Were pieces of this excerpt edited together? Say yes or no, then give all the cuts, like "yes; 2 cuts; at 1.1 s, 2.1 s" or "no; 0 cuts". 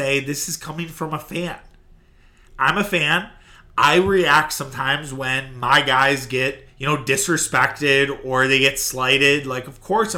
yes; 2 cuts; at 2.5 s, 6.7 s